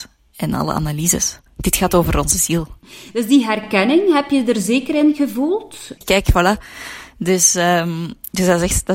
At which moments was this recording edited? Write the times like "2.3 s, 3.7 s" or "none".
1.5 s, 6.0 s